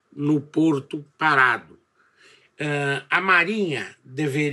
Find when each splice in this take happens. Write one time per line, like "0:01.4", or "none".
0:02.4